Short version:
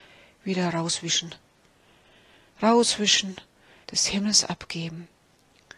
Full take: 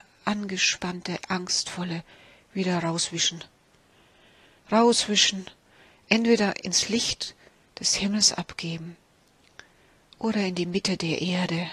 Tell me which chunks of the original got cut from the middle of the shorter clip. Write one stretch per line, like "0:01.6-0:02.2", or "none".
0:05.9-0:07.7